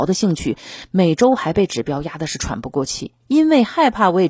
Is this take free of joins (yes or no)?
no